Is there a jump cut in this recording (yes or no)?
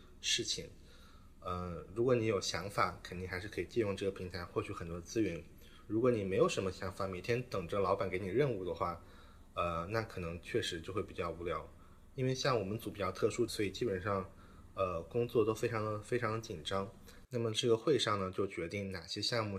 yes